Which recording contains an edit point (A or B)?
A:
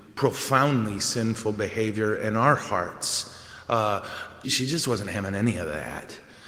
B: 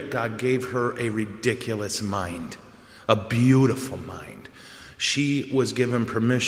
A